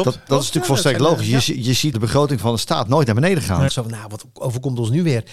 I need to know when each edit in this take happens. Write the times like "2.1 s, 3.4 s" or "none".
1.9 s, 3.7 s